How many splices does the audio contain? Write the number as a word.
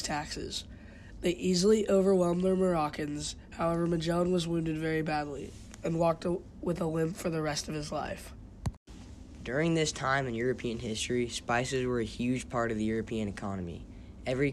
zero